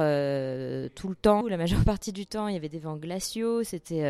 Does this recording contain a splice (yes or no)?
yes